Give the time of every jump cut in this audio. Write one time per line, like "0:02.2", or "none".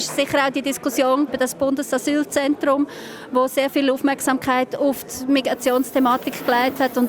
0:01.3